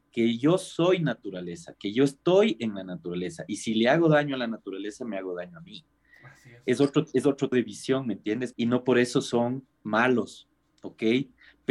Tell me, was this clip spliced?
yes; 2 cuts; at 7.5 s, 8.5 s

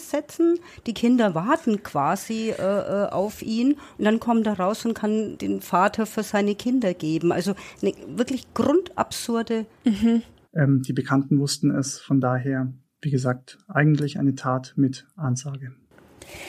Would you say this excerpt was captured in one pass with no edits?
no; 1 cut; at 10.4 s

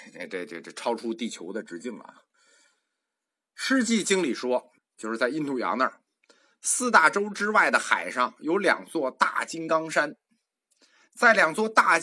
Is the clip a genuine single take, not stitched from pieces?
no; 1 cut; at 4.8 s

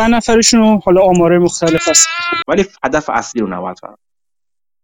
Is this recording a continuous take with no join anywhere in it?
no; 1 cut; at 2.4 s

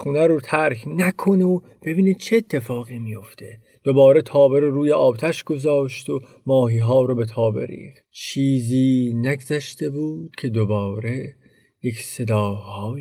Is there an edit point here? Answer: yes; 1 cut; at 8.0 s

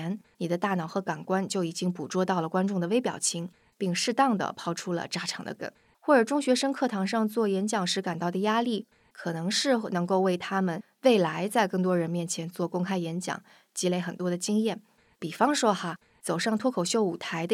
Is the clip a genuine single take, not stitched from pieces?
no; 1 cut; at 15.1 s

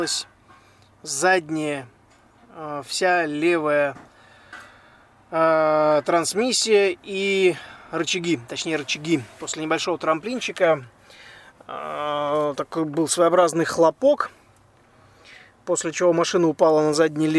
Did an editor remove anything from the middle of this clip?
no; 0 cuts

